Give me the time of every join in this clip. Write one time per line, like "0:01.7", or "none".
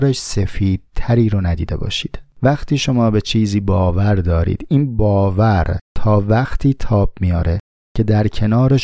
0:02.3